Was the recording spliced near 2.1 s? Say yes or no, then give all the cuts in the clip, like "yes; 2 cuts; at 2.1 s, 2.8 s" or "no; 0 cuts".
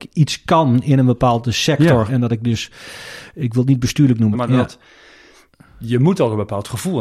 yes; 2 cuts; at 2.1 s, 4.3 s